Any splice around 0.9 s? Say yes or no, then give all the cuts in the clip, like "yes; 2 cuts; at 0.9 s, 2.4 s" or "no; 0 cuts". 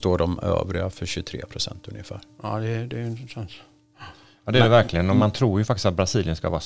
yes; 1 cut; at 0.9 s